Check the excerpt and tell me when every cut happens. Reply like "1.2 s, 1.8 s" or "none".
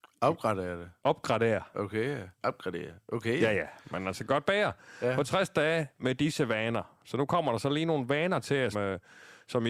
2.4 s, 8.7 s